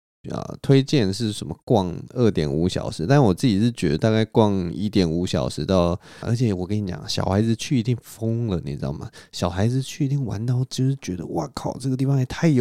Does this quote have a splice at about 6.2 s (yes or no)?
yes